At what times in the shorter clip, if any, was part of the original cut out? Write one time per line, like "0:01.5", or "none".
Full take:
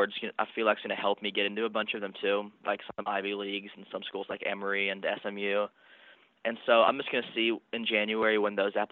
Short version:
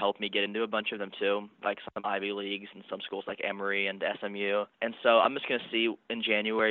0:04.7